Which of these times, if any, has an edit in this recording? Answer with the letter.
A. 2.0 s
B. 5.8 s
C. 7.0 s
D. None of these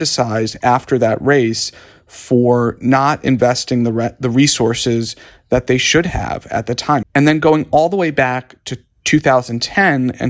C